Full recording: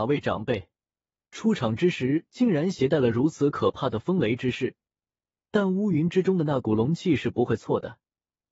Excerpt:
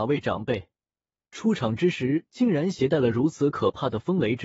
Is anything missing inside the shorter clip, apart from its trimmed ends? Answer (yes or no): no